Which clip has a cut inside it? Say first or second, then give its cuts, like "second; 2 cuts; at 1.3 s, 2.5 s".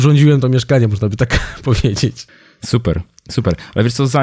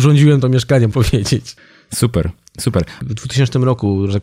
second; 2 cuts; at 0.9 s, 3.0 s